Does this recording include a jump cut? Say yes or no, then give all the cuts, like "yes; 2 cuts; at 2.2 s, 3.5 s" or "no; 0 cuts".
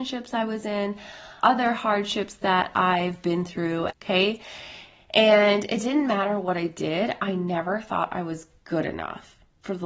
yes; 2 cuts; at 1.4 s, 3.9 s